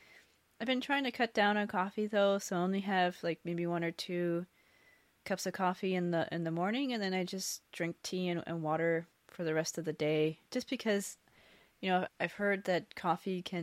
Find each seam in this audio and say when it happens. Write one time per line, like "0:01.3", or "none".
0:10.5
0:12.1